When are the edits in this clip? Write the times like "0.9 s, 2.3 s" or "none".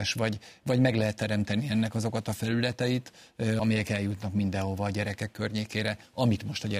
3.6 s